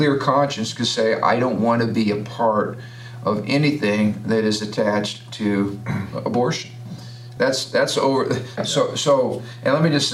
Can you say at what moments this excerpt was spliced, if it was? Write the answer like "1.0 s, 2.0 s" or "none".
7.4 s, 8.6 s